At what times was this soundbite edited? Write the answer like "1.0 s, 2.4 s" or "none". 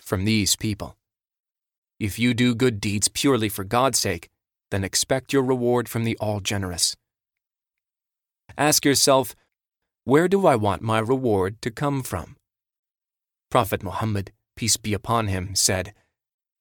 none